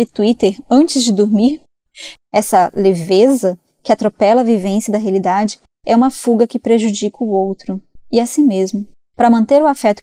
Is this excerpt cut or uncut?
cut